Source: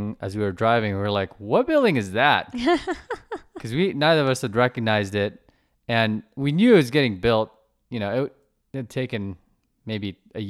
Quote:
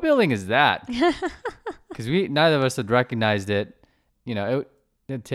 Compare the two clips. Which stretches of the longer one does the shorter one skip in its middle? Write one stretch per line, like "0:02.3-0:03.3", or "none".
0:05.8-0:07.8